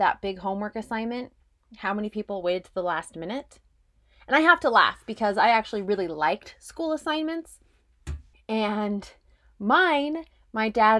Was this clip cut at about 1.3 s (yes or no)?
no